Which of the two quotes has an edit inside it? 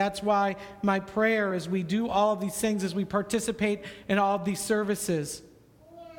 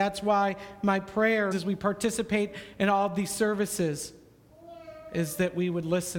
second; 1 cut; at 1.5 s

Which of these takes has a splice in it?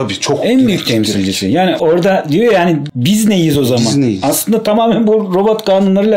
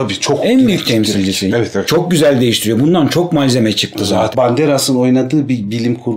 second; 2 cuts; at 1.5 s, 4.3 s

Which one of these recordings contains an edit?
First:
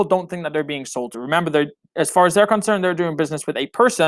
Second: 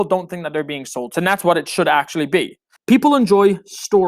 second; 2 cuts; at 1.1 s, 2.8 s

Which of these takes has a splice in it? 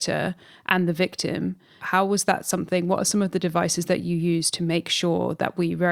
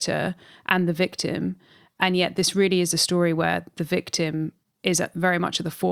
first; 1 cut; at 1.8 s

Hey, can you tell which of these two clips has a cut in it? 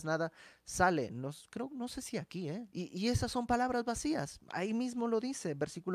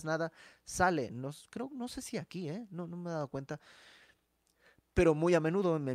first; 1 cut; at 2.7 s

